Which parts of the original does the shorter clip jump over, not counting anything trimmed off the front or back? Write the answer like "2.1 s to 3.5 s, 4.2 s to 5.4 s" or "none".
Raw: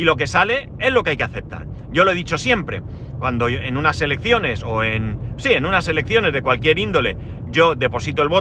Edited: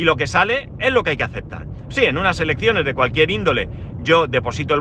1.9 s to 5.3 s